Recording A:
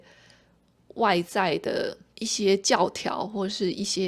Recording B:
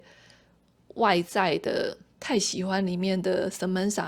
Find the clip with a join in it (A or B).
B